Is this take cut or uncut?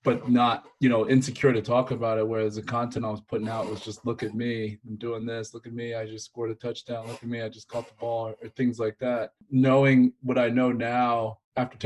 uncut